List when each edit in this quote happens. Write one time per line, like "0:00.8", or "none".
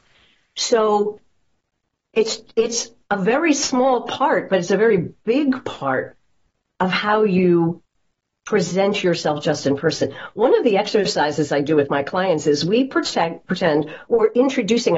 none